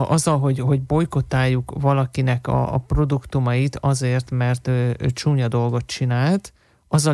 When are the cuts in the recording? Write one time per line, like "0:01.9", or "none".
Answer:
0:05.0